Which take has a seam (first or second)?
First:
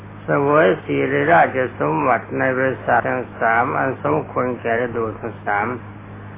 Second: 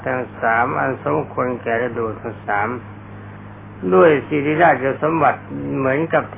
first